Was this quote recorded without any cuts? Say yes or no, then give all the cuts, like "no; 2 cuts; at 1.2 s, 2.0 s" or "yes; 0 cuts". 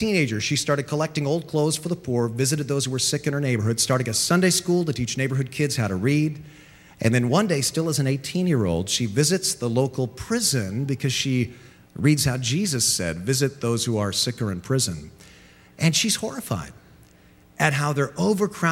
yes; 0 cuts